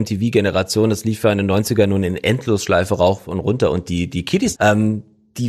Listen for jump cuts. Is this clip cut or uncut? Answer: cut